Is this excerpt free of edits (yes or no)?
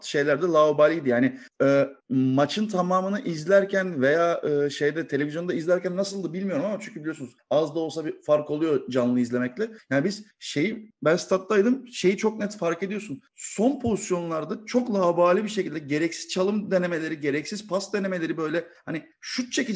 yes